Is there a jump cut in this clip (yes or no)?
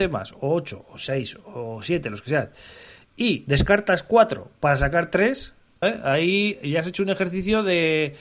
yes